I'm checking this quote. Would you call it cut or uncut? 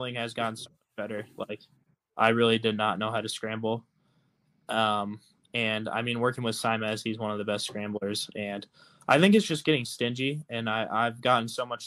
uncut